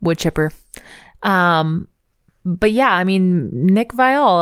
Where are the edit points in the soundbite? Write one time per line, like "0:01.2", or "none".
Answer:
none